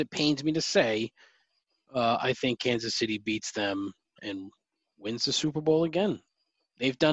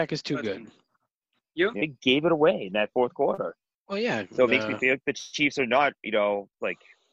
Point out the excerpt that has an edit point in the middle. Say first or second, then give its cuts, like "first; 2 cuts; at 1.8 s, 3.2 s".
second; 1 cut; at 1.8 s